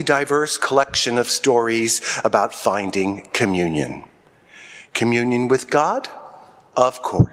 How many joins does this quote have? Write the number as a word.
zero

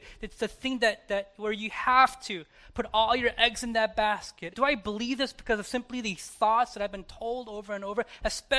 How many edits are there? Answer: one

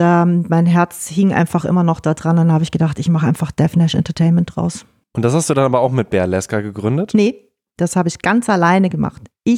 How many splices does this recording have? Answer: zero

